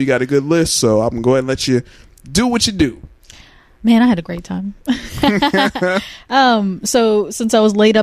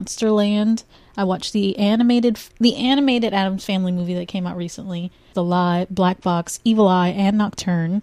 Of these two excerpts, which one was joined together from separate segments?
second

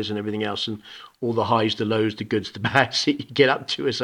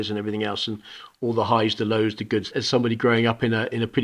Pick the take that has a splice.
second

